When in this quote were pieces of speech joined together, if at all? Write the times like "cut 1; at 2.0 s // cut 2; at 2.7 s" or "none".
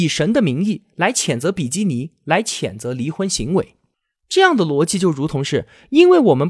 none